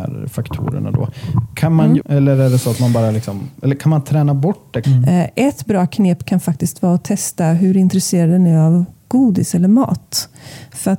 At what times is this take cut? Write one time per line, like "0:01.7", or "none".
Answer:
0:02.0
0:04.8